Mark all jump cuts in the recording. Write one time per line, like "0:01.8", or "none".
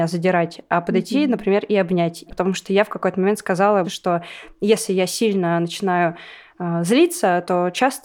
0:02.3
0:03.8